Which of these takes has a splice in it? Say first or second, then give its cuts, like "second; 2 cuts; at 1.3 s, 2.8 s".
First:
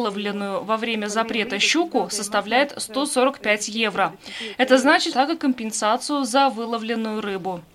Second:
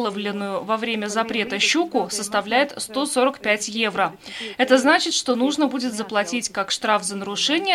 first; 1 cut; at 5.1 s